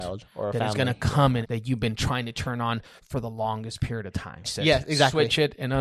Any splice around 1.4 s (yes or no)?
yes